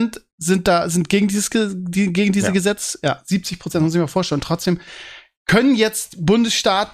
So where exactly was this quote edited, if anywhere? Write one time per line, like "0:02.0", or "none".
none